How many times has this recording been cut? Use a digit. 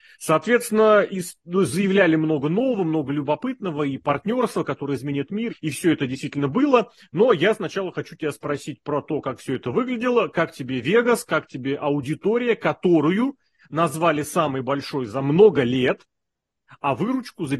1